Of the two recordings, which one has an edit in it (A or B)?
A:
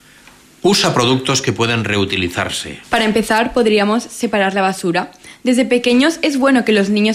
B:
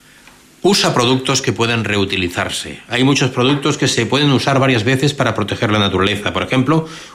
A